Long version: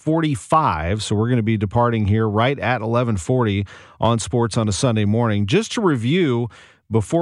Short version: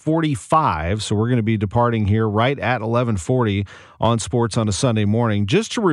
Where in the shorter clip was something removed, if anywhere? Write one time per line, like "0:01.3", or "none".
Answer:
none